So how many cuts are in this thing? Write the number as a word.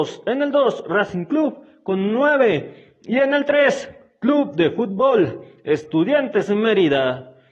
zero